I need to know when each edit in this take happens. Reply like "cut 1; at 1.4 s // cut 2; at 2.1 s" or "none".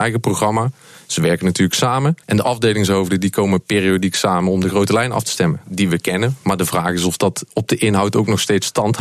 cut 1; at 2.2 s // cut 2; at 5.7 s